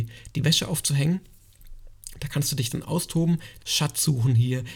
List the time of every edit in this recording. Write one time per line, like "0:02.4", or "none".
0:03.6